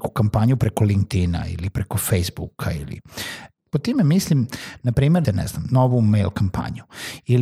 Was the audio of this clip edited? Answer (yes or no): yes